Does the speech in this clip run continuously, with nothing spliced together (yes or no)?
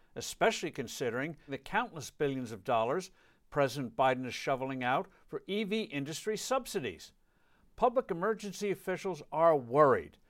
yes